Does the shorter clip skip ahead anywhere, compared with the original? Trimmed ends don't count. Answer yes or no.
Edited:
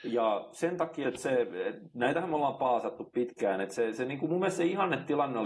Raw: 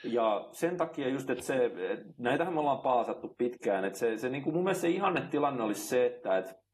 yes